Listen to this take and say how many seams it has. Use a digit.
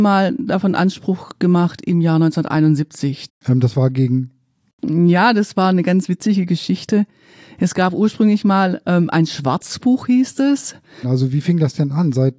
2